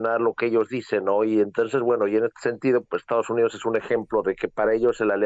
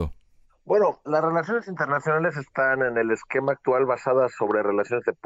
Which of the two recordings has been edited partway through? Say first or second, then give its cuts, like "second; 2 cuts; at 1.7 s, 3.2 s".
first; 1 cut; at 2.9 s